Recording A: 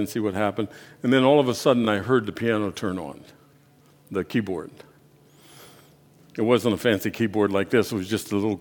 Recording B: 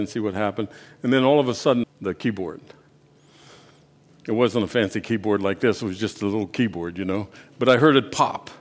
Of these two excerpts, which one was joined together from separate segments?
B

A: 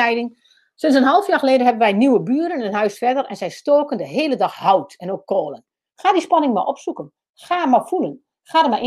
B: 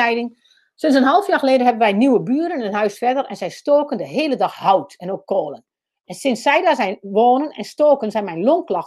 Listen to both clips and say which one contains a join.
A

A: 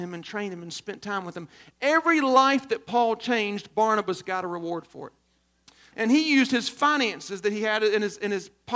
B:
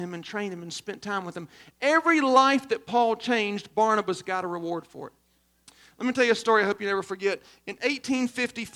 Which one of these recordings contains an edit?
A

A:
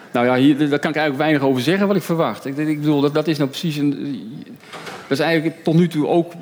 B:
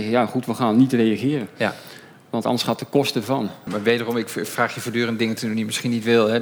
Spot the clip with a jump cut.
B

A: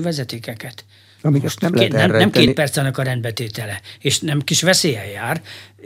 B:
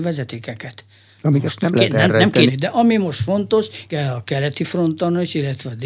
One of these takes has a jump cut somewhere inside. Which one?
B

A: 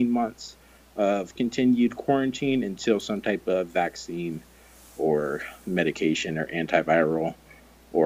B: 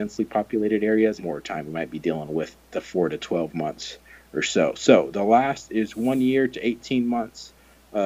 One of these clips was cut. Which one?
B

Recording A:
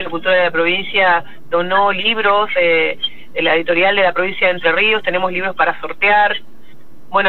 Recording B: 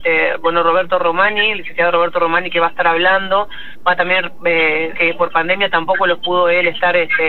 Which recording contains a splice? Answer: B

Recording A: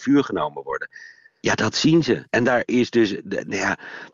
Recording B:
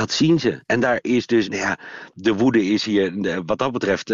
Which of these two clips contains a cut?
B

